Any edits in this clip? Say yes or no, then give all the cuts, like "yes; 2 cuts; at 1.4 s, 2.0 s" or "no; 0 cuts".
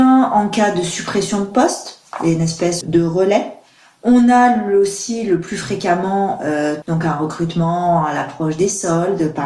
yes; 2 cuts; at 2.8 s, 6.8 s